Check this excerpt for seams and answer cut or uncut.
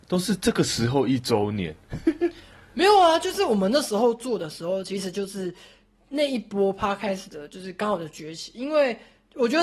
uncut